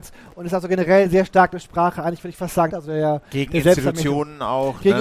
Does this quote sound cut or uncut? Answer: cut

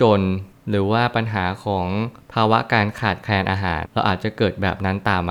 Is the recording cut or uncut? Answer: cut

